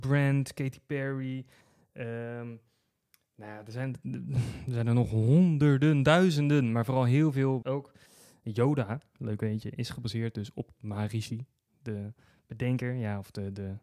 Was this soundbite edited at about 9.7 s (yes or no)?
no